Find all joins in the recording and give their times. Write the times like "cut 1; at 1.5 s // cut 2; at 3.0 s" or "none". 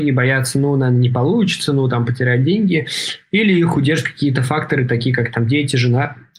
none